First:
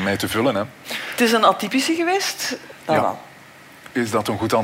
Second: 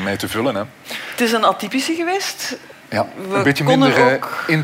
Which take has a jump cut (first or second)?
first